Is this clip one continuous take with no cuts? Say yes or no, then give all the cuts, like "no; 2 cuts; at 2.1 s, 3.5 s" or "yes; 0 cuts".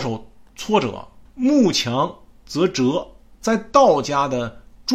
no; 1 cut; at 1.3 s